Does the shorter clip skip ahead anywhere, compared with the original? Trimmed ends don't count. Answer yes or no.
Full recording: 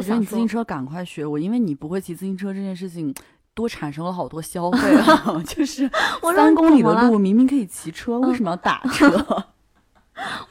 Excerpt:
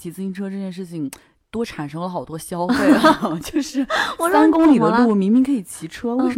no